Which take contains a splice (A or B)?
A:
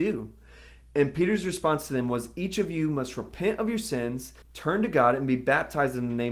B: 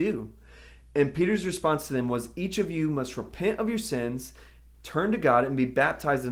A